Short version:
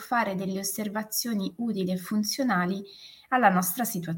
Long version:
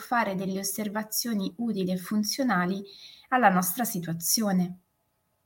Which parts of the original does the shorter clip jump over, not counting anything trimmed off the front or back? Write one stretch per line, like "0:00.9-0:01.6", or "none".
none